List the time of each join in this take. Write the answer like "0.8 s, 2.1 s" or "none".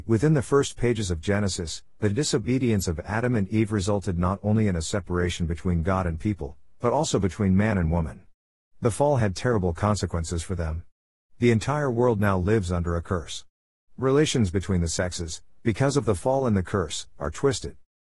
none